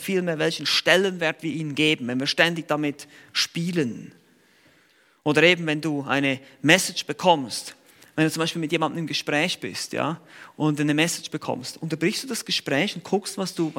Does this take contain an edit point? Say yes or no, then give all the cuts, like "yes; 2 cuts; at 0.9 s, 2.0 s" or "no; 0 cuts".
no; 0 cuts